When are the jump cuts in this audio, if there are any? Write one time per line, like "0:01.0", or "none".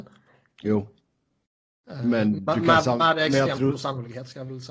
none